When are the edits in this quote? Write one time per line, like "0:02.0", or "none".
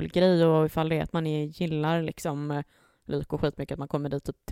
none